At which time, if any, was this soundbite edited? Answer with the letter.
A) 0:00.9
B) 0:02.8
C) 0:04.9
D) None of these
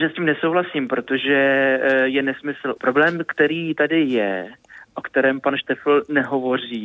B